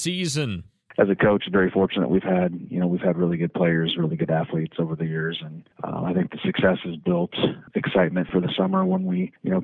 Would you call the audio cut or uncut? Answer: uncut